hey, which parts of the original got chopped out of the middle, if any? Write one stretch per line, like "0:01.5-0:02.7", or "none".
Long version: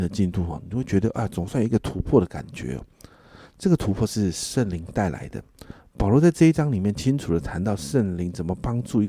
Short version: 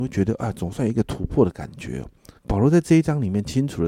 0:03.1-0:05.9